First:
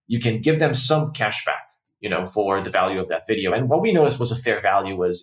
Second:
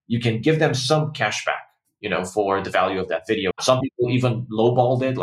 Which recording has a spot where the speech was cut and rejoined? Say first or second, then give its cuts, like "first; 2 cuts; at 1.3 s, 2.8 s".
second; 1 cut; at 3.5 s